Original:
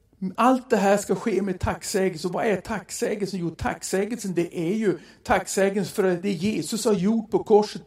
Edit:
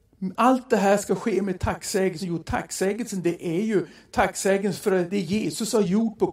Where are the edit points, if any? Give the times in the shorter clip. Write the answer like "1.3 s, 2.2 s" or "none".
2.2 s